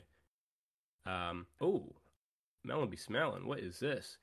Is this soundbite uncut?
no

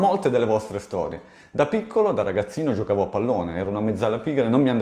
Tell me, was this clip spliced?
no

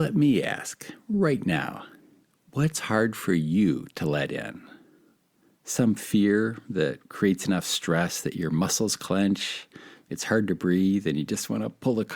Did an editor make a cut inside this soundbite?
no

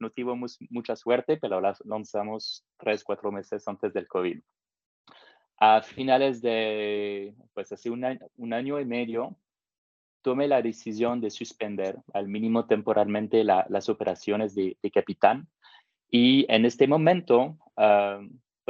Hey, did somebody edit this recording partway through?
no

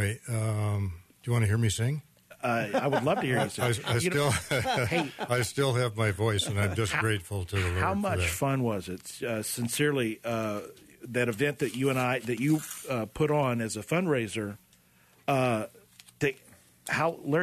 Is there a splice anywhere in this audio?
no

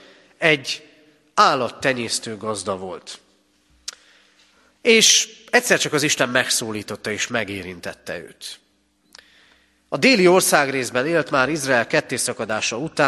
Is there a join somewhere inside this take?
no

